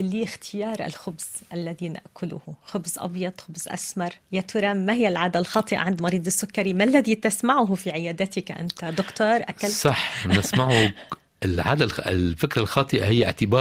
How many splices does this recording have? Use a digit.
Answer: 1